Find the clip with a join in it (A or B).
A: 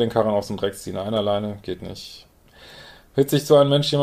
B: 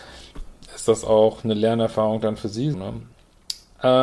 B